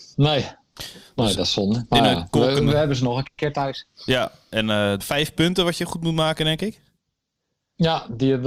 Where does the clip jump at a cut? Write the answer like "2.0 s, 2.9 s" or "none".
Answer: 5.0 s